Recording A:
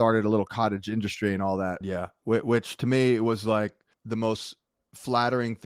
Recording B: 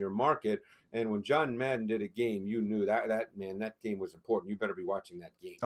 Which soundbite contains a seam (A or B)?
A